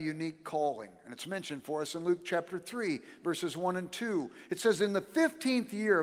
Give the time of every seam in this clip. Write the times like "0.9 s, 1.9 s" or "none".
none